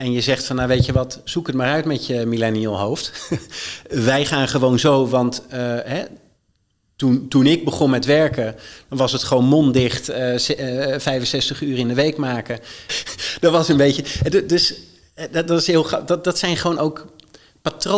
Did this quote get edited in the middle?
yes; 1 cut; at 12.9 s

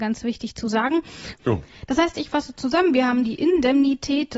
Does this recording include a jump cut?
yes; 1 cut; at 1.4 s

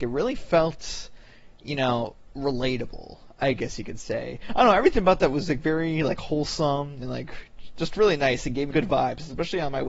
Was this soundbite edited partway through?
yes; 2 cuts; at 4.5 s, 8.7 s

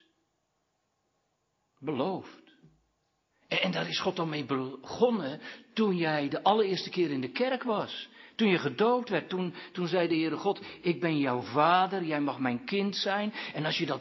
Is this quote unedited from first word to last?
no; 1 cut; at 3.3 s

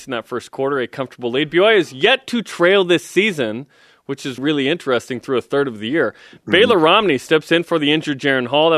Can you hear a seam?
yes; 1 cut; at 4.4 s

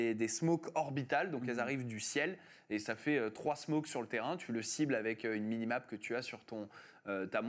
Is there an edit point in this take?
no; 0 cuts

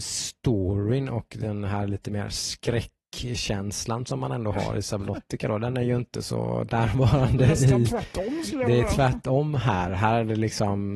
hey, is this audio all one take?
yes; 0 cuts

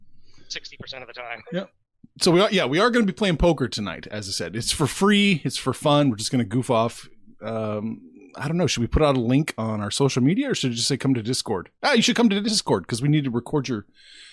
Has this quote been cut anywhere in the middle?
no; 0 cuts

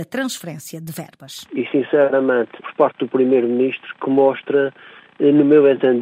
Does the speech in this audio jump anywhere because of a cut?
yes; 2 cuts; at 1.5 s, 2.6 s

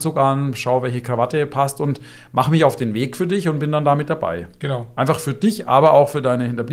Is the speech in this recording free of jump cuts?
yes; 0 cuts

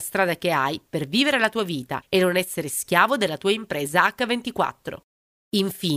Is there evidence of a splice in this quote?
no; 0 cuts

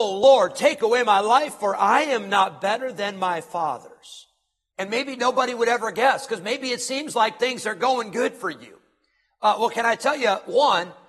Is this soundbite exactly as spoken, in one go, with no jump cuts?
no; 1 cut; at 4.7 s

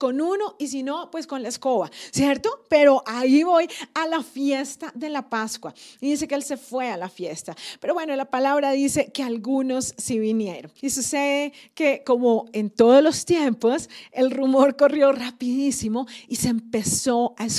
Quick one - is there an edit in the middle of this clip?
yes; 1 cut; at 10.8 s

